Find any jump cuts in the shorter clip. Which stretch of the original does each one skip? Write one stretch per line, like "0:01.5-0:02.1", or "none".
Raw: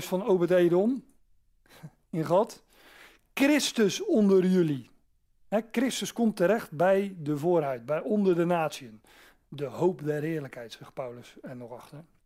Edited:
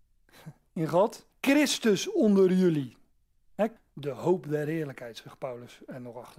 0:02.7-0:03.3
0:05.7-0:09.3